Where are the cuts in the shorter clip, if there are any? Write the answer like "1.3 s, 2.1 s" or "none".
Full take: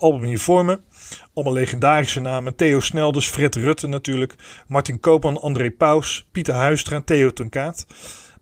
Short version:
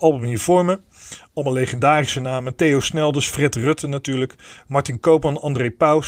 none